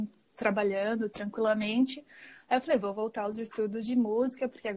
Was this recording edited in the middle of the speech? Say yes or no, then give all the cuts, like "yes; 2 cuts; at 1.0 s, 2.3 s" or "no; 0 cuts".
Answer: no; 0 cuts